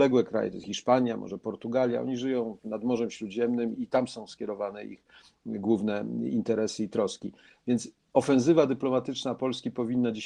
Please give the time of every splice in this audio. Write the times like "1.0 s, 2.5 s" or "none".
3.7 s